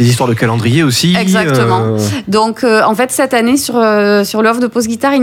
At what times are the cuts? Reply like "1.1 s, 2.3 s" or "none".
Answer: none